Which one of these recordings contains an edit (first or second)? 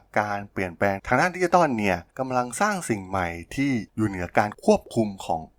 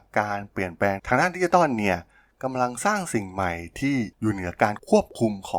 first